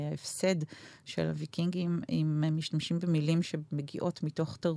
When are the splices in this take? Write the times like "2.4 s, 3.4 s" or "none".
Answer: none